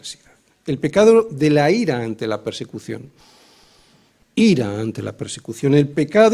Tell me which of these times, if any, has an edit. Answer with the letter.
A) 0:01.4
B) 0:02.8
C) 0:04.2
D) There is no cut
C